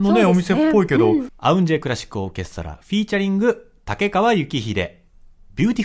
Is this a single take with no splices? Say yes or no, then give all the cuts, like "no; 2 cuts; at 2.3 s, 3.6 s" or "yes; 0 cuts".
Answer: no; 1 cut; at 1.3 s